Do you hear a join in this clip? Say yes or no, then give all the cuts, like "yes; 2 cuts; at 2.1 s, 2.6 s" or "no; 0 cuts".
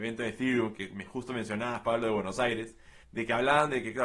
yes; 1 cut; at 3.0 s